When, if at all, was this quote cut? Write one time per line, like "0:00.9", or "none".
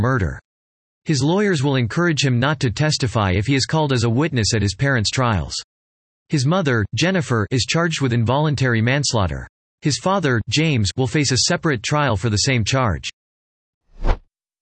none